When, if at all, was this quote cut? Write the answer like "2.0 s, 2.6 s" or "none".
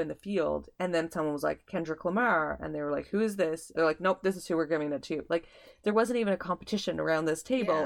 3.7 s